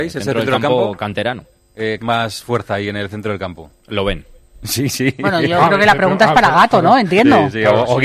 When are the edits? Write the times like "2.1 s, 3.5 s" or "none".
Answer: 2.0 s, 3.8 s